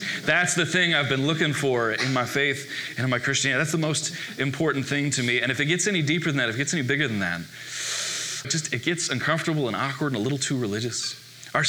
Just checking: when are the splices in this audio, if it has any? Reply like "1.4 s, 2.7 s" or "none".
8.4 s